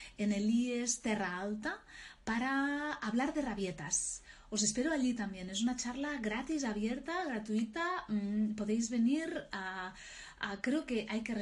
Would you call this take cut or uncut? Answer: uncut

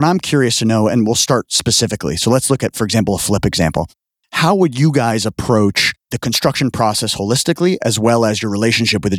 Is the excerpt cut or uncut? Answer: uncut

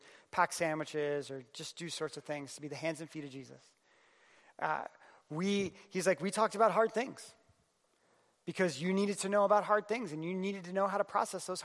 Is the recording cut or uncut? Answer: uncut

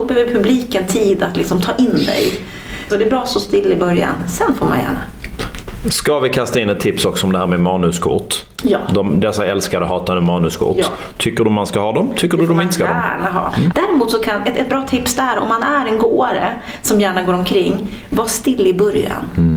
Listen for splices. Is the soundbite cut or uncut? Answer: cut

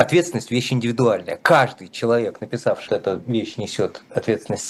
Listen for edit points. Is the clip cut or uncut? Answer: cut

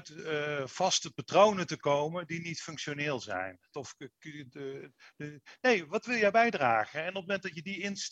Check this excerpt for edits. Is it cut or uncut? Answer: cut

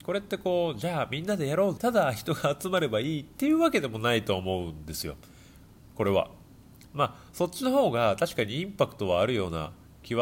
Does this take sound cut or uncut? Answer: cut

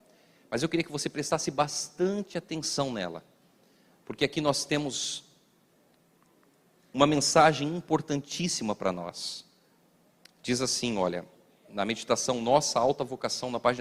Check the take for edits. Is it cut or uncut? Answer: uncut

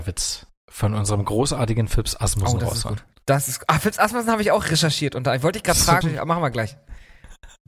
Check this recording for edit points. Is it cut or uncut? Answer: cut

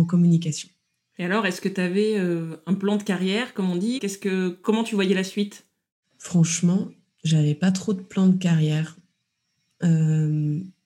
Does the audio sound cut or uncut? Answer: cut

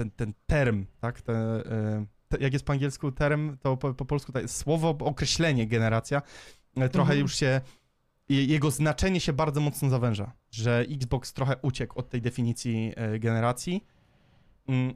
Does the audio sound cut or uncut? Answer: cut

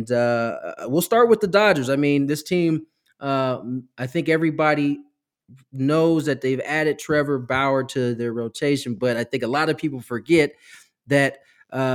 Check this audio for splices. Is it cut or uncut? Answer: uncut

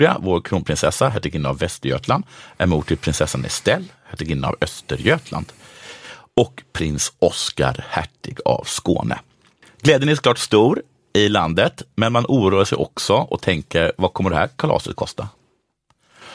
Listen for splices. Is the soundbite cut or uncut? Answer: uncut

